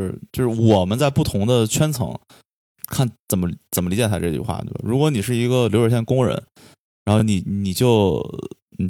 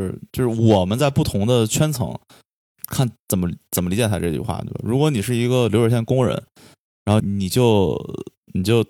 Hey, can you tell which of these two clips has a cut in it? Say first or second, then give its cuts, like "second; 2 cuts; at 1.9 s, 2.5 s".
second; 1 cut; at 7.2 s